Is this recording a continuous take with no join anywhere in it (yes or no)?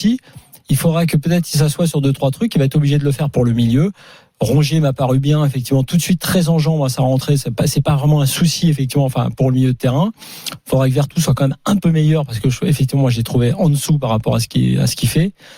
yes